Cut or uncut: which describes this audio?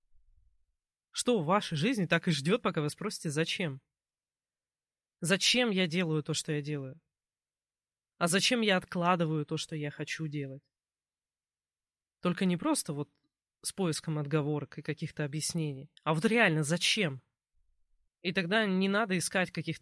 cut